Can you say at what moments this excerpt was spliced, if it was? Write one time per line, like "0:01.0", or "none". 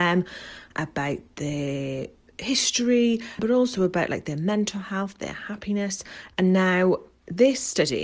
0:03.4
0:06.3